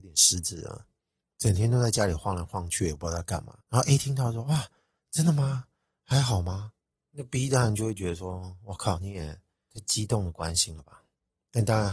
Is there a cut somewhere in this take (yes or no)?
yes